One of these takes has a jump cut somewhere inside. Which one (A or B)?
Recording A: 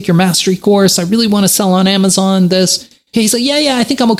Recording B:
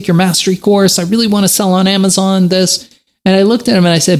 A